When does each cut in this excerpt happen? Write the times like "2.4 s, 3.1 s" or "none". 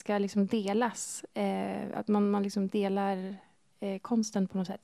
none